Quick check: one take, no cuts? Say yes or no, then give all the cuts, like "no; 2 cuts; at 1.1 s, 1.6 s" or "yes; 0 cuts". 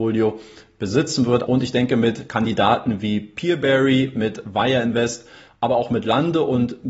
no; 1 cut; at 1.5 s